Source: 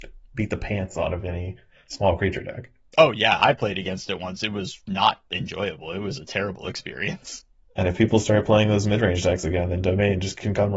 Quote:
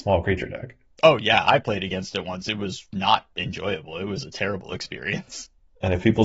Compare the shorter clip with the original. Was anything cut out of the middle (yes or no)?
no